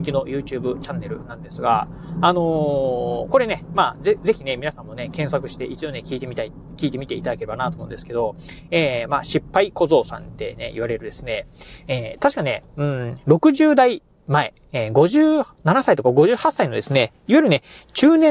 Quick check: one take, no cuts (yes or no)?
yes